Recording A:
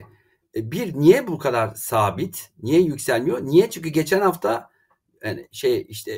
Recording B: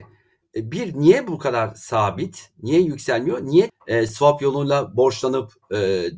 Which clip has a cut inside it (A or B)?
B